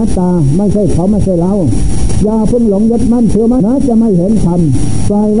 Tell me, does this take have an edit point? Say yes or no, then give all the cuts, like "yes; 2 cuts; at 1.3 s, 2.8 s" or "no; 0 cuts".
yes; 1 cut; at 3.6 s